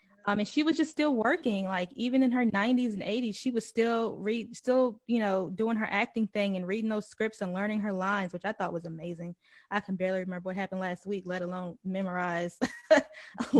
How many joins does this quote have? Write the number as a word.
zero